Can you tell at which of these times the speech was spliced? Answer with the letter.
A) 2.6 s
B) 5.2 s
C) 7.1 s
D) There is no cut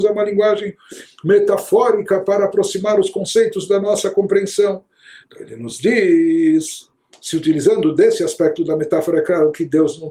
B